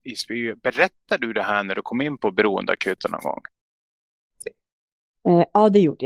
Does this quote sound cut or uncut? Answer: uncut